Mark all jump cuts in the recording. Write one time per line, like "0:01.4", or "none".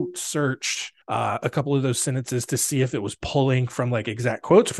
0:01.0